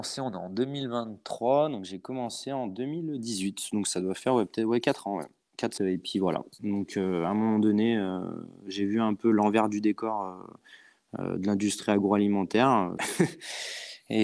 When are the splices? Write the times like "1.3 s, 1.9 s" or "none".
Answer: 5.8 s, 13.0 s